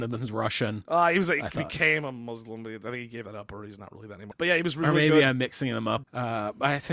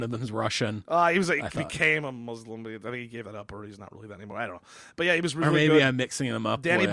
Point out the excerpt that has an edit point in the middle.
first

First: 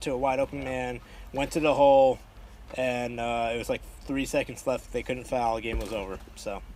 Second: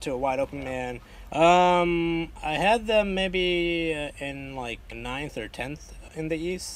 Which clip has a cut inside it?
second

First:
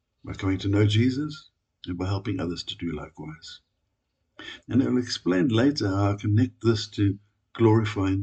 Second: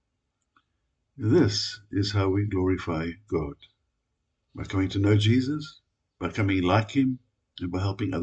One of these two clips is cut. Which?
first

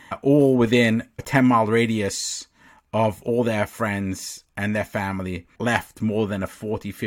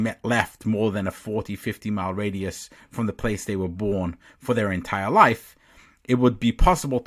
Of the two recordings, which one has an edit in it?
first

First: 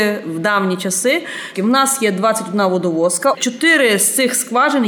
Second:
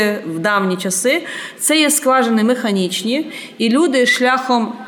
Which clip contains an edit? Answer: first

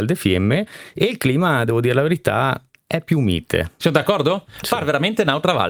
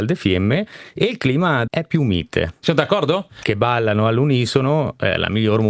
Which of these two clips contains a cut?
second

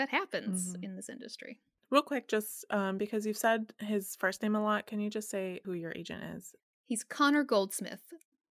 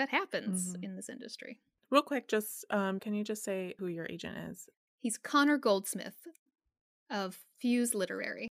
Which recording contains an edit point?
second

